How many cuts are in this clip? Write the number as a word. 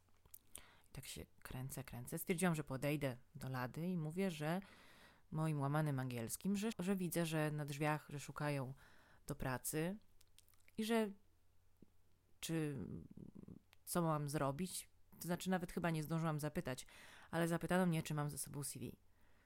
one